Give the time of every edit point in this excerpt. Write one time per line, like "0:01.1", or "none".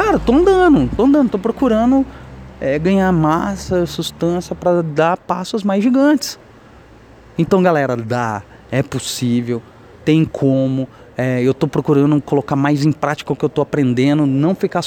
none